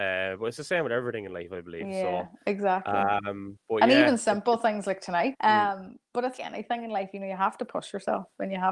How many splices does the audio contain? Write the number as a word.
two